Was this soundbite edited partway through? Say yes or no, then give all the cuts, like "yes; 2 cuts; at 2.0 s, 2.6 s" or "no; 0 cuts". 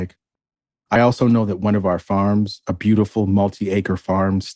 no; 0 cuts